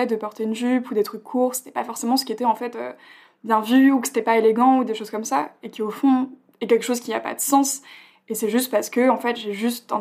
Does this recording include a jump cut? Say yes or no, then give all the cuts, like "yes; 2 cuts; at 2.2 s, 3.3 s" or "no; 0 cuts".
no; 0 cuts